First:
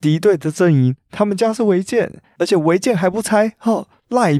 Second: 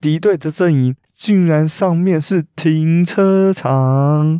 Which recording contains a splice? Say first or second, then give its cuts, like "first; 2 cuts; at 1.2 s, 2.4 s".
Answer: second; 1 cut; at 1.0 s